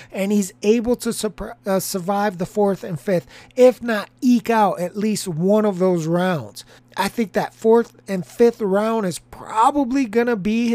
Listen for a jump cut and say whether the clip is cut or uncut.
cut